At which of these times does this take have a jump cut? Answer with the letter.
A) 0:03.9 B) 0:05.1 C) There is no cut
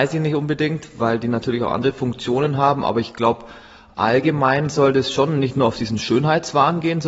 C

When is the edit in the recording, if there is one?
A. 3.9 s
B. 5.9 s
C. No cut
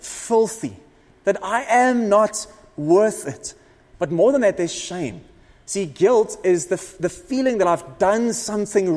A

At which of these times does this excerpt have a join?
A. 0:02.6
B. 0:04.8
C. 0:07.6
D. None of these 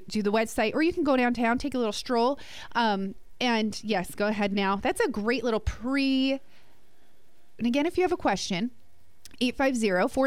C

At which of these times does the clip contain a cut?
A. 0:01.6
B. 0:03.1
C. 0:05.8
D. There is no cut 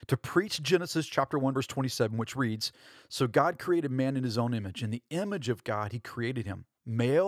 D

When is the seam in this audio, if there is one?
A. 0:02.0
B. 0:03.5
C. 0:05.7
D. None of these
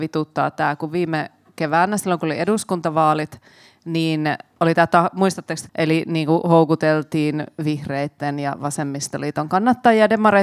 C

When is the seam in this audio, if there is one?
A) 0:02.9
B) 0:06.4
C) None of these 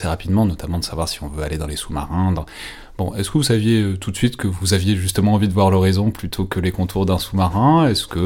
C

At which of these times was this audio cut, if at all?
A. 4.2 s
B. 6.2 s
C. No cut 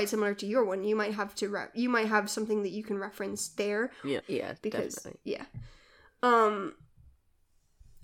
A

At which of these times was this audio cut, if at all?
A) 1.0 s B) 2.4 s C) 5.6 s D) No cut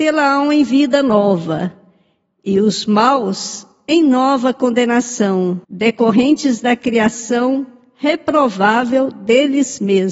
C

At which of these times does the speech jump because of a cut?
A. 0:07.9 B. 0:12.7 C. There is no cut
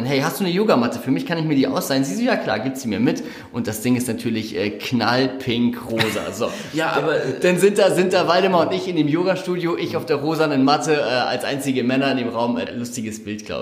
B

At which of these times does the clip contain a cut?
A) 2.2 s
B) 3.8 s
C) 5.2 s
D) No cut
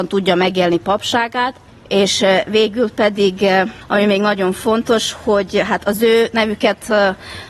D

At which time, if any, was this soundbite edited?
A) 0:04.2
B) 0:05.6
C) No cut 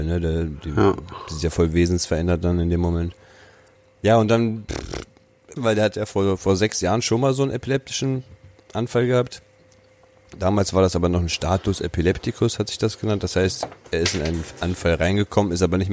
B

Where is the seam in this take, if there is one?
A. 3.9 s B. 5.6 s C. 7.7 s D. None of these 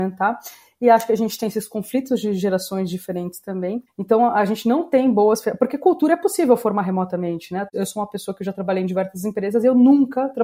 A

